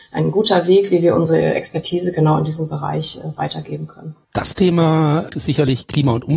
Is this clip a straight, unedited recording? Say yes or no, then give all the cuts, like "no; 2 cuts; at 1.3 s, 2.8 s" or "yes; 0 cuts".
no; 2 cuts; at 4.2 s, 5.3 s